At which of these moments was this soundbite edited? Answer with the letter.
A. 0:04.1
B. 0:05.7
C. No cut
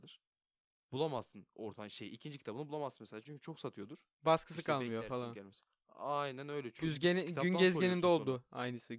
A